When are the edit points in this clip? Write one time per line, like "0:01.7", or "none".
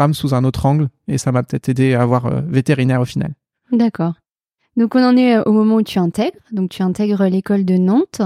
none